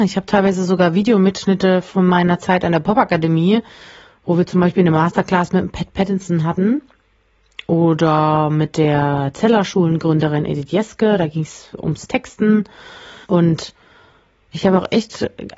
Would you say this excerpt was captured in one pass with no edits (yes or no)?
no